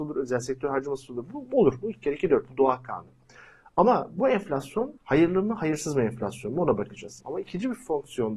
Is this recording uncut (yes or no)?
no